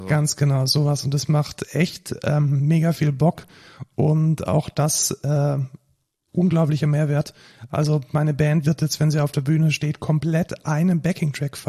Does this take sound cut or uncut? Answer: uncut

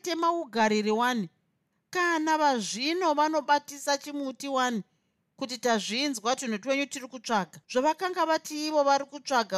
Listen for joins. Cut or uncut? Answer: cut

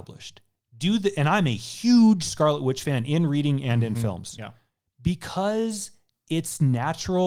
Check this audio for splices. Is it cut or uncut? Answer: uncut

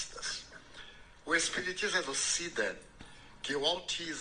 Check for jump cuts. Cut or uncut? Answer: uncut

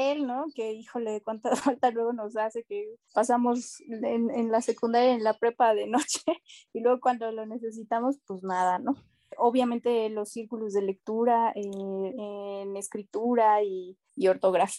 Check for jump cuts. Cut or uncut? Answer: cut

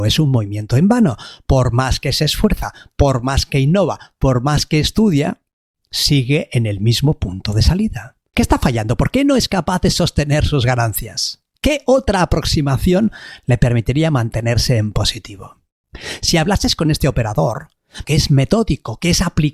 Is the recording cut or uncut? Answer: cut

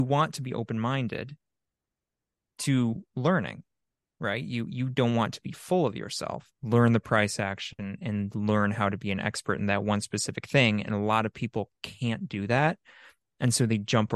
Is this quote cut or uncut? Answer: cut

